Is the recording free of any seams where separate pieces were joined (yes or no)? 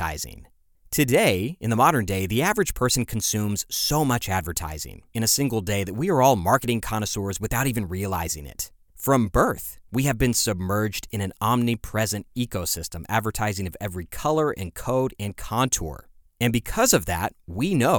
yes